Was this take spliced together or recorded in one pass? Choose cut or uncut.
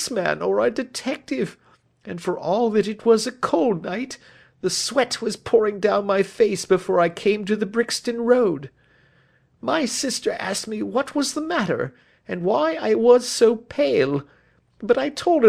uncut